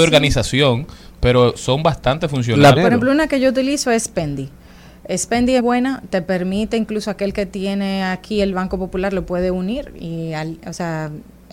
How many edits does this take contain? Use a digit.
2